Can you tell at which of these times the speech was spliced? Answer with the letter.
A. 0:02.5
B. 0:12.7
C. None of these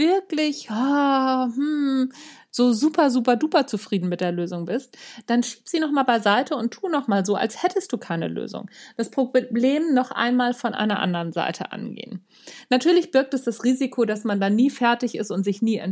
C